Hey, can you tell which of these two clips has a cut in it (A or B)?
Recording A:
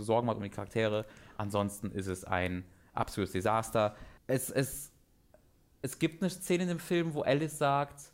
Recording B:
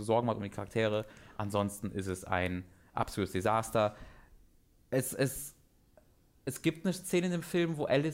A